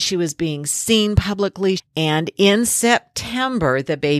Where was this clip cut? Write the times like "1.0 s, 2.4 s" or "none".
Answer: 1.8 s